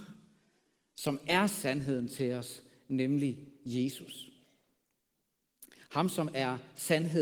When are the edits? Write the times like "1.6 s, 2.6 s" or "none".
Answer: none